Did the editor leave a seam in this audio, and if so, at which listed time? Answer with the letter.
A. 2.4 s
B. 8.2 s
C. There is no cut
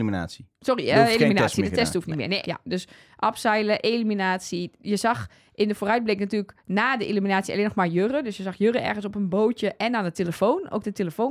A